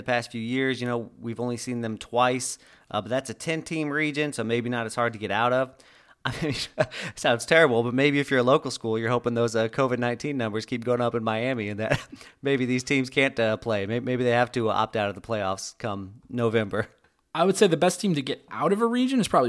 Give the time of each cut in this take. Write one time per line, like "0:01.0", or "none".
none